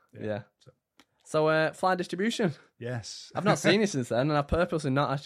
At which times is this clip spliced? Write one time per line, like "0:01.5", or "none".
none